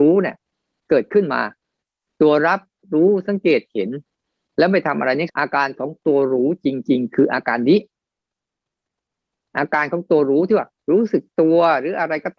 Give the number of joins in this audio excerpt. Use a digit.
1